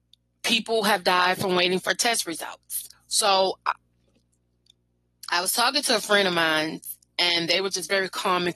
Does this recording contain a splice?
yes; 1 cut; at 2.9 s

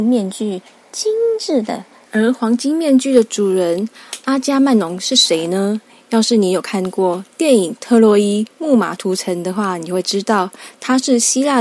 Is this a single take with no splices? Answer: no; 1 cut; at 2.0 s

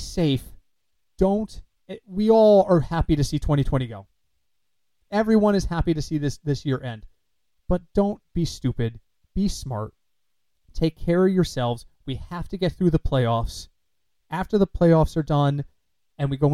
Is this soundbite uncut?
yes; 0 cuts

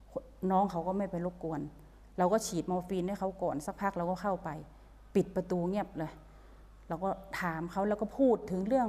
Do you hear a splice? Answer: no; 0 cuts

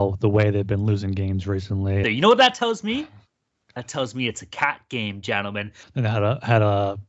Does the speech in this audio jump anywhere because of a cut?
yes; 2 cuts; at 2.0 s, 5.8 s

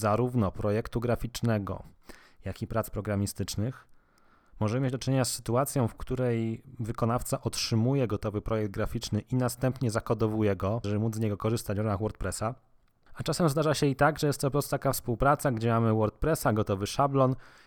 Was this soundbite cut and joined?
yes; 1 cut; at 10.8 s

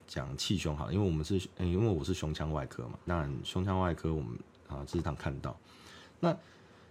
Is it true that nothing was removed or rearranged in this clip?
no; 2 cuts; at 3.1 s, 5.0 s

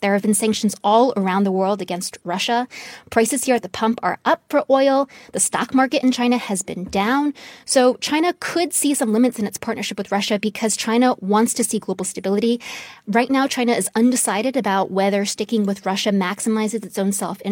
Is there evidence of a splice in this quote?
no; 0 cuts

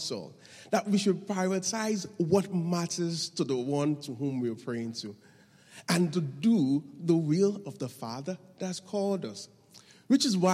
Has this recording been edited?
no; 0 cuts

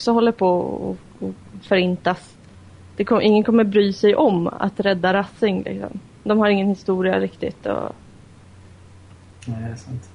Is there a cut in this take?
no; 0 cuts

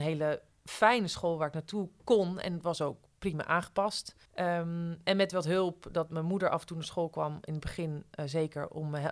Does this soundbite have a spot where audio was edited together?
yes; 1 cut; at 4.3 s

